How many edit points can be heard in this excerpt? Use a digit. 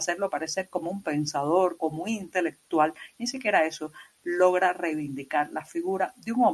1